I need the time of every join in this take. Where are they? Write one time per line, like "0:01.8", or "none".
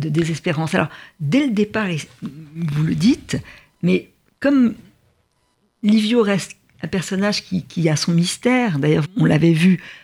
0:09.0